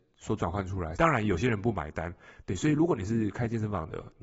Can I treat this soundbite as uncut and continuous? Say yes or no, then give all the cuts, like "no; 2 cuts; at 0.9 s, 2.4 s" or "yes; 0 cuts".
no; 2 cuts; at 1.0 s, 2.4 s